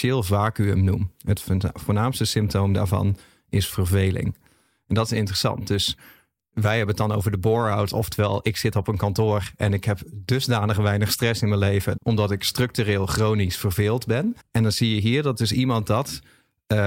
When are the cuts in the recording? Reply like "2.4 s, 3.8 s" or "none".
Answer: 12.0 s, 14.4 s